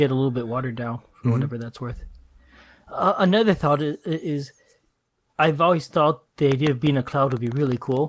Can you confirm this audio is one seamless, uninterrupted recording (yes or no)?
yes